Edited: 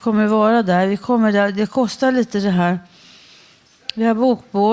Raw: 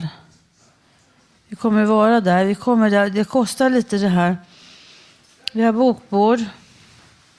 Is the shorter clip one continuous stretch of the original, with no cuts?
yes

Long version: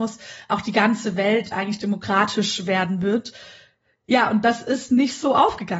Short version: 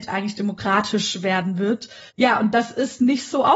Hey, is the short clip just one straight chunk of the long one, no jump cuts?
no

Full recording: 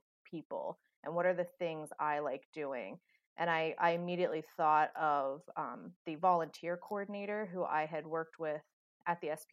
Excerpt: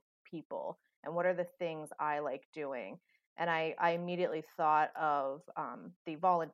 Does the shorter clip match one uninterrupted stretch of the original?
yes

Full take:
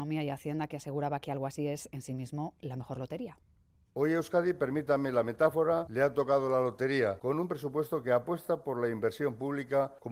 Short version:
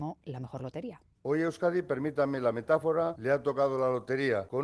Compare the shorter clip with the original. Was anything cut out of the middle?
yes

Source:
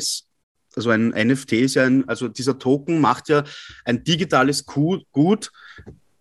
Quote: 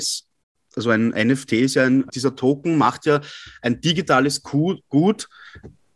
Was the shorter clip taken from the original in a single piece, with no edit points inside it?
no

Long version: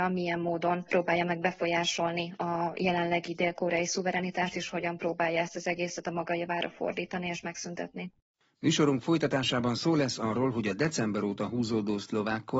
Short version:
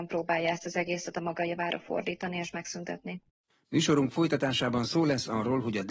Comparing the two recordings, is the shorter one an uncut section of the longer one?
yes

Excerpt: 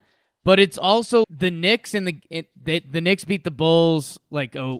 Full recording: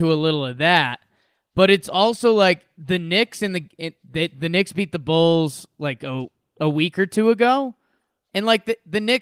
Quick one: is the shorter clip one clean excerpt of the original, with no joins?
no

